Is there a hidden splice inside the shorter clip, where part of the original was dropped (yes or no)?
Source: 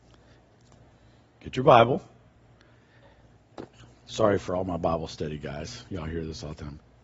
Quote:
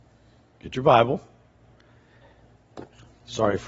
no